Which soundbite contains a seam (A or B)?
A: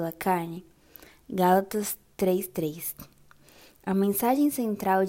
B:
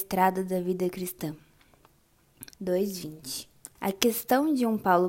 B